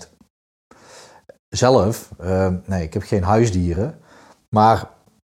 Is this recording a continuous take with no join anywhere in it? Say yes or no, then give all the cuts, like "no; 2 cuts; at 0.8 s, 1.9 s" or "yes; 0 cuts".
no; 1 cut; at 4.4 s